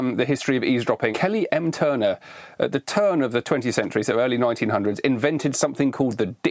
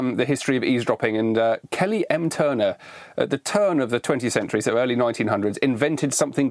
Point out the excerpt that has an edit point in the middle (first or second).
first